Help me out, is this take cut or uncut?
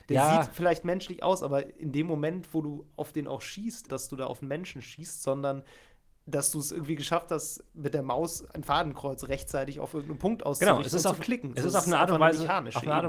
cut